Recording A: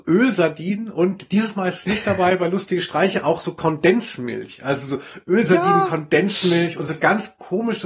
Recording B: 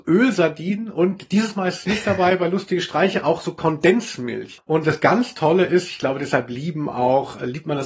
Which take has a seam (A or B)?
B